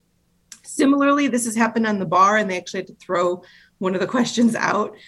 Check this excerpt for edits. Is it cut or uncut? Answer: uncut